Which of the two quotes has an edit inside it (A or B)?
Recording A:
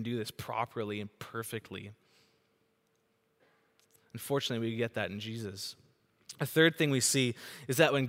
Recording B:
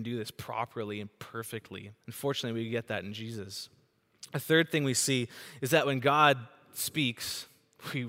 B